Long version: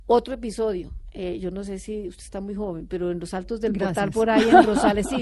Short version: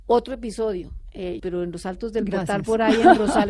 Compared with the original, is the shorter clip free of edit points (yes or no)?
no